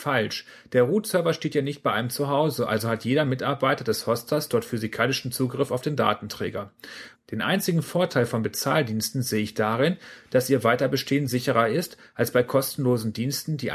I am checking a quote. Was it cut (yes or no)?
yes